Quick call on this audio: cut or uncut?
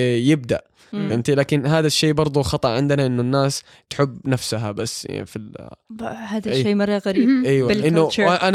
uncut